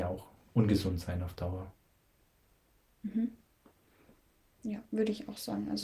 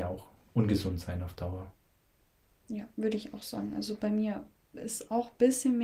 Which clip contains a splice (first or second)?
second